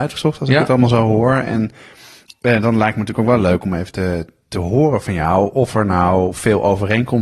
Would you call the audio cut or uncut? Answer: uncut